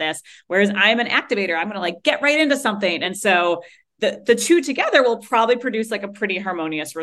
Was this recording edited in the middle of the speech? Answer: no; 0 cuts

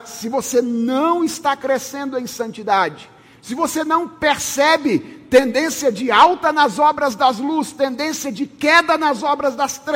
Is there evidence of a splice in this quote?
no; 0 cuts

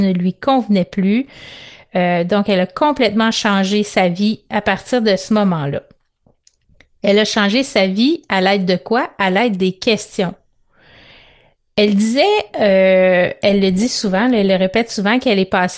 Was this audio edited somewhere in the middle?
no; 0 cuts

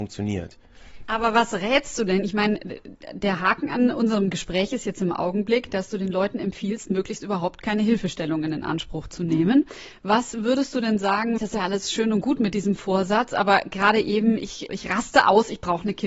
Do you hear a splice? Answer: yes; 3 cuts; at 1.0 s, 11.4 s, 14.7 s

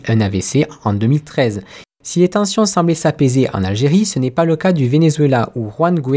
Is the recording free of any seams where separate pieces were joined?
yes; 0 cuts

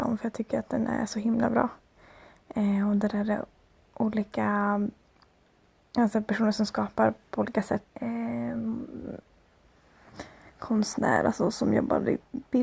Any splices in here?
yes; 1 cut; at 7.8 s

